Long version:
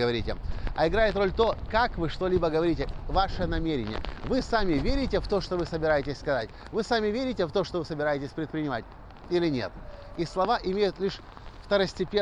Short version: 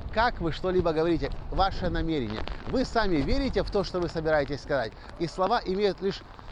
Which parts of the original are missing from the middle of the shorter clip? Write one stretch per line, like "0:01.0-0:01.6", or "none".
0:06.7-0:10.1